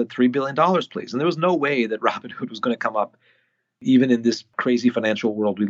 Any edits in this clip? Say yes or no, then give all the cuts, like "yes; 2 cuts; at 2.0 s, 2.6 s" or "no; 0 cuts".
no; 0 cuts